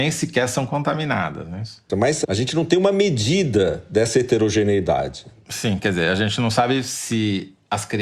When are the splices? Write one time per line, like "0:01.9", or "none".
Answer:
0:01.9